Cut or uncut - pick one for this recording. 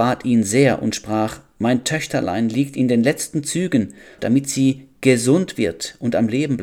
cut